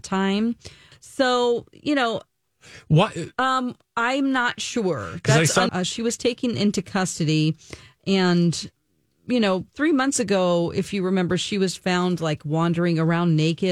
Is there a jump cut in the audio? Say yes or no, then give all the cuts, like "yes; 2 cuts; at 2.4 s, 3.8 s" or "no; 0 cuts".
yes; 3 cuts; at 0.9 s, 3.3 s, 5.7 s